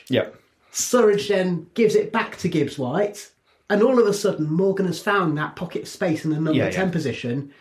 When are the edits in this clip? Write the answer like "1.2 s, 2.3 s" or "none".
none